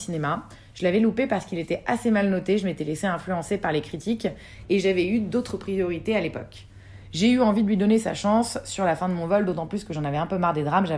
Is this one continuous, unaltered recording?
yes; 0 cuts

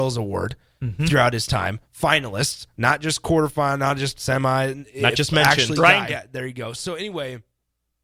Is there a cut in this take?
yes; 1 cut; at 6.1 s

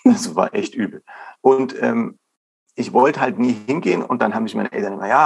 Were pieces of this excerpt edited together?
no; 0 cuts

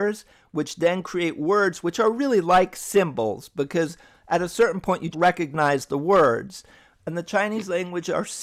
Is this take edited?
yes; 1 cut; at 5.1 s

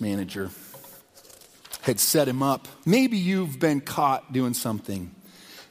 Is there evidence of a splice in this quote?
yes; 1 cut; at 2.8 s

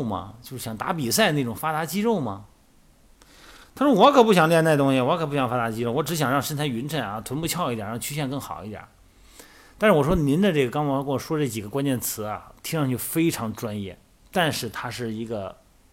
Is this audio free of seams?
yes; 0 cuts

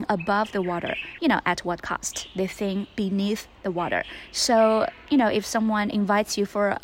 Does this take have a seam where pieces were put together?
yes; 1 cut; at 1.2 s

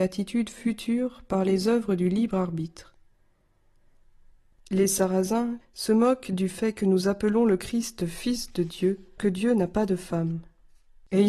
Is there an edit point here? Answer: yes; 3 cuts; at 4.5 s, 5.6 s, 9.2 s

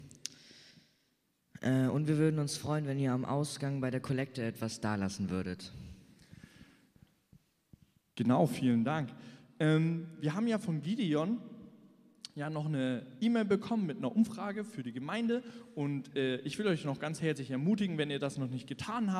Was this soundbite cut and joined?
no; 0 cuts

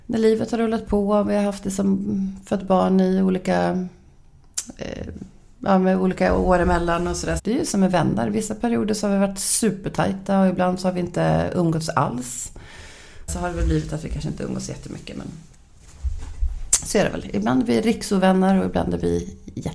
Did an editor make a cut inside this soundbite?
yes; 2 cuts; at 7.4 s, 13.3 s

